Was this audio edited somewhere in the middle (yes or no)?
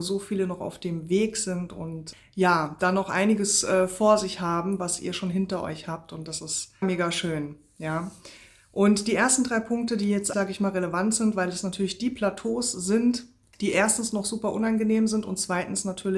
yes